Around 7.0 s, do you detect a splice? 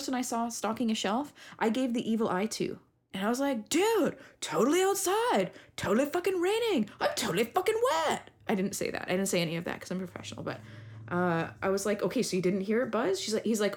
no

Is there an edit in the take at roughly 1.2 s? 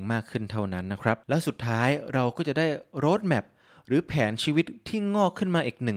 yes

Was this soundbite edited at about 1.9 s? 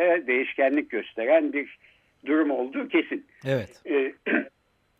no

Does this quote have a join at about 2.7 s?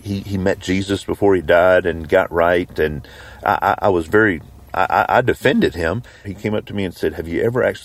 no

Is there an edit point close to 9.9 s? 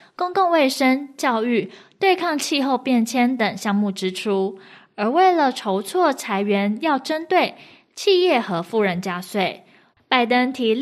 yes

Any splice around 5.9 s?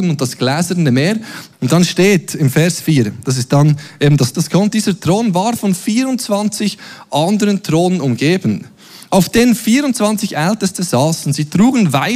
no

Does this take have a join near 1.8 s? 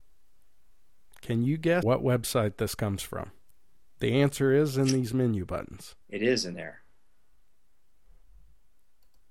yes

